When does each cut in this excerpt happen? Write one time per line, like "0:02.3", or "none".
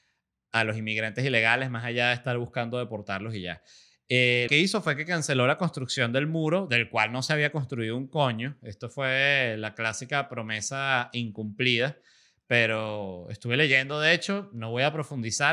0:04.5